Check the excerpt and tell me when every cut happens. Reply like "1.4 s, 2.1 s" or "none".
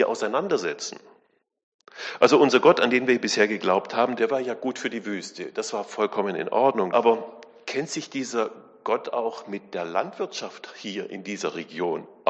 4.2 s, 6.9 s